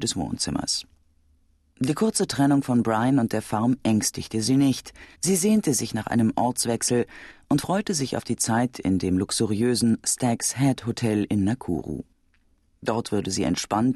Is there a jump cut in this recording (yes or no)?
yes